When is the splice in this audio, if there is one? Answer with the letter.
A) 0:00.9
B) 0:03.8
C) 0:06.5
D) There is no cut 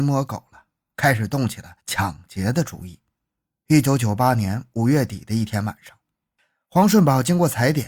D